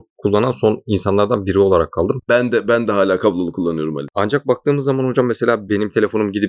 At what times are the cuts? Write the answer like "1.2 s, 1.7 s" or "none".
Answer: none